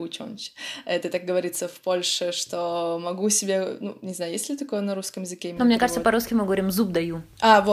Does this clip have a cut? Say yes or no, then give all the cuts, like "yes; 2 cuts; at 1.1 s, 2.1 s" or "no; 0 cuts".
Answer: no; 0 cuts